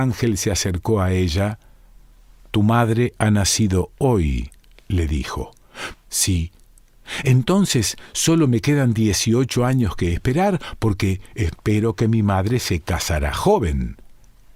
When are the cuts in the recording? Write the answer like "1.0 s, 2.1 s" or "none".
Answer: 5.9 s